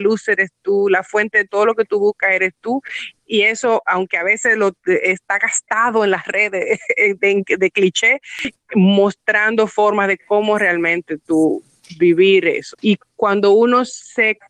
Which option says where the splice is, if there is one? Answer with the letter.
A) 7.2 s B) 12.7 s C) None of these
B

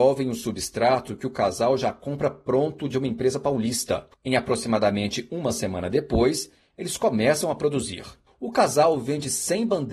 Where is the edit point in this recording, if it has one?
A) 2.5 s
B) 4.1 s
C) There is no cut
B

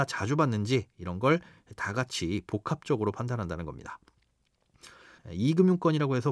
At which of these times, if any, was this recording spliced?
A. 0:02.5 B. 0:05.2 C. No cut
B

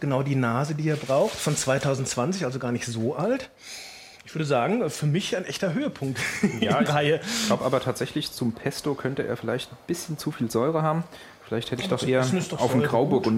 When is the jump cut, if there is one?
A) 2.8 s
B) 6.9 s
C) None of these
B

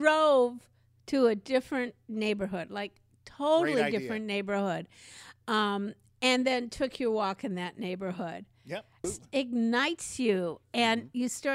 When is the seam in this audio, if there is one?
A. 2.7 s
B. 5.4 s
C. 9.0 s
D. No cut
C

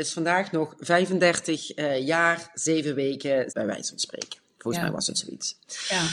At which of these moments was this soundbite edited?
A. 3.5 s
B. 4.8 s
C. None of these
A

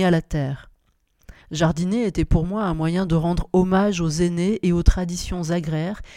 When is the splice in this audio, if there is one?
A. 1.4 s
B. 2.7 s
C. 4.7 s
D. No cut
A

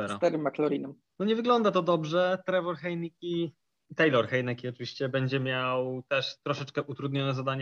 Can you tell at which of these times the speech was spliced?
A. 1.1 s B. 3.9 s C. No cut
A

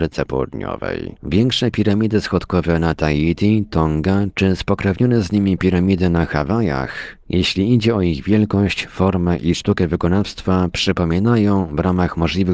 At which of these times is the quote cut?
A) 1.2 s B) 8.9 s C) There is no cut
A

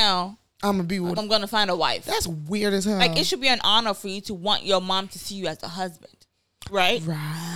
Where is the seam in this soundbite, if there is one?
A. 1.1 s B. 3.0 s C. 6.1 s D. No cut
A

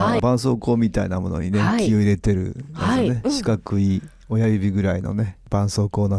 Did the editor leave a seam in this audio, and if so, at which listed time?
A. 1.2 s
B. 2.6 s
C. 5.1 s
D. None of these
D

